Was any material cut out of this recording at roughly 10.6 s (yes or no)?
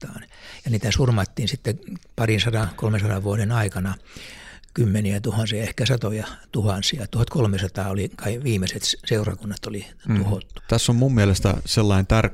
yes